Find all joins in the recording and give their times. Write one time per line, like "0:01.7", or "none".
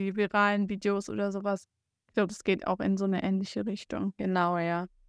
none